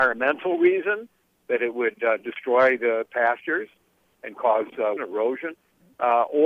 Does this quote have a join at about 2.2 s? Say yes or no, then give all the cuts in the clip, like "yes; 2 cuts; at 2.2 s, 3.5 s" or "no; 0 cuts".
no; 1 cut; at 5.0 s